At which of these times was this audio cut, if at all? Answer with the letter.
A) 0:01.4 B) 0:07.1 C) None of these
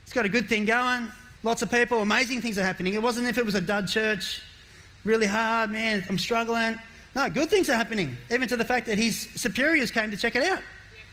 A